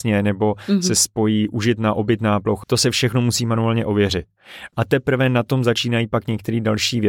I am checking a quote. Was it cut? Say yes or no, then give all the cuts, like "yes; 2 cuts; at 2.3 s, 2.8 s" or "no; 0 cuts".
yes; 2 cuts; at 2.6 s, 4.7 s